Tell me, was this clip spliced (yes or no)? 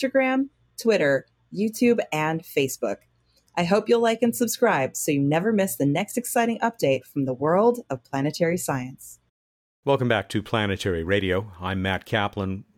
no